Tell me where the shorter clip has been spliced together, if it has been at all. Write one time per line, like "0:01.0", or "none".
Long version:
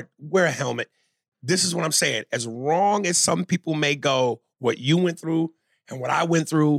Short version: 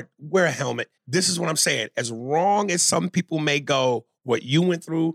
0:01.0

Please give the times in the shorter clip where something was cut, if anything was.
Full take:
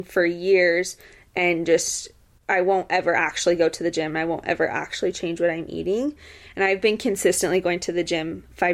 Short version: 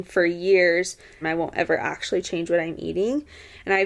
0:01.2

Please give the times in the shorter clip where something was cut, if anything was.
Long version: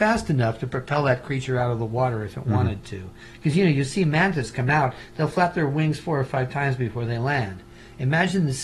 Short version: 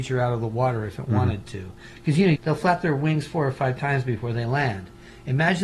0:02.4

